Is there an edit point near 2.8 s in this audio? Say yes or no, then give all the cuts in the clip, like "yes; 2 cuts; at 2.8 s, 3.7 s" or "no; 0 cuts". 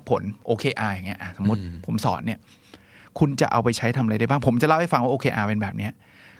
no; 0 cuts